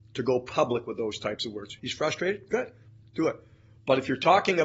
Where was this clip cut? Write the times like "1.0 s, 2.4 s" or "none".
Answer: 1.8 s